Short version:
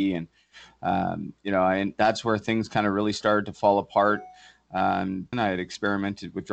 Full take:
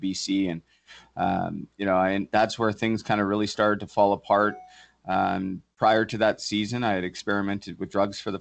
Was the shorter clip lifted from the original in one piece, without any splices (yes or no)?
no